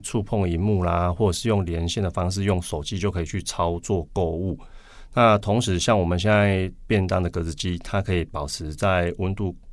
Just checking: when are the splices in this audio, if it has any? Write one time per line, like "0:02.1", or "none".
none